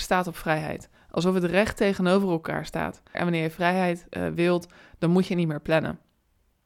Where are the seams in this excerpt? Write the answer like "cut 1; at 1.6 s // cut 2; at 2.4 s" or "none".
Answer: cut 1; at 3.1 s

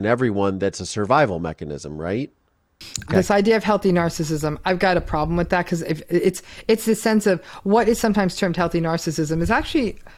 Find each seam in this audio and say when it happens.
cut 1; at 3.1 s

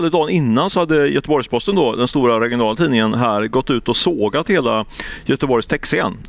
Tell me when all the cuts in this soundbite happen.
none

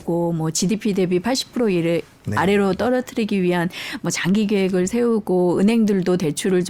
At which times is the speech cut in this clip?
none

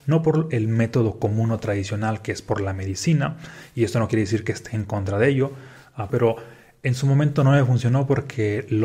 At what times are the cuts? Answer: cut 1; at 6.1 s

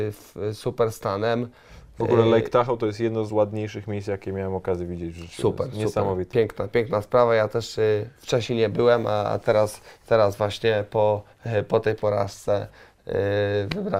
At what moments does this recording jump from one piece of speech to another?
cut 1; at 3.3 s

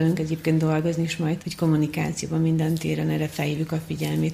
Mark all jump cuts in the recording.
cut 1; at 1.4 s

